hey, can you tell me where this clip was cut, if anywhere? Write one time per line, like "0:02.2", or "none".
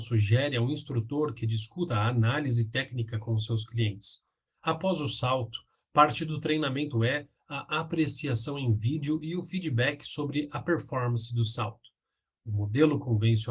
0:04.5